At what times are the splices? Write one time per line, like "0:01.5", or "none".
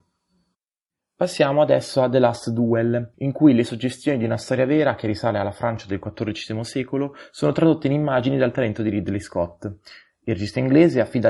0:03.1